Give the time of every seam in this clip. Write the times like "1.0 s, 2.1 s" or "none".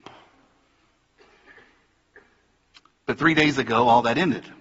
none